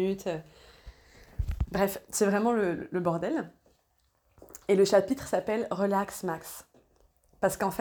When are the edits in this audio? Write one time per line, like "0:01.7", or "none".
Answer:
none